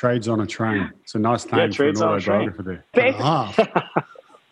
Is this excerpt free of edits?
no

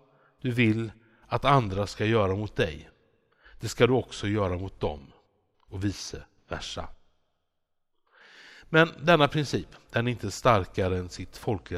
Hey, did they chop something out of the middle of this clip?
no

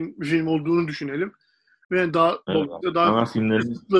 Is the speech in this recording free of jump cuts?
no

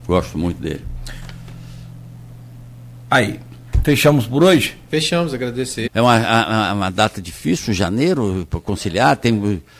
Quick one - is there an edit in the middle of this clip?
yes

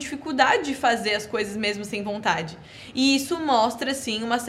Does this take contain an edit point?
no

